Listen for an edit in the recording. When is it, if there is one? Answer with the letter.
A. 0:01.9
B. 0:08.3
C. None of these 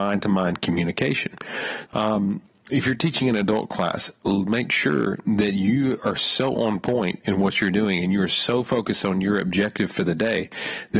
A